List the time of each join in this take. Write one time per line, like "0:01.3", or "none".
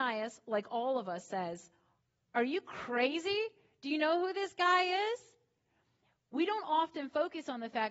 none